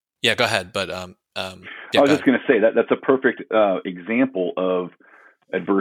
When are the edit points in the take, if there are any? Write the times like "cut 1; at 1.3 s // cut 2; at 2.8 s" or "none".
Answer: none